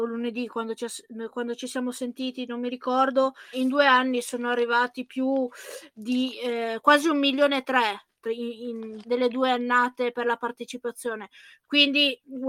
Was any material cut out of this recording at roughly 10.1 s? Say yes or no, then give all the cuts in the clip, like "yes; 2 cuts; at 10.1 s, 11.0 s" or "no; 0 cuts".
yes; 3 cuts; at 3.5 s, 9.0 s, 10.1 s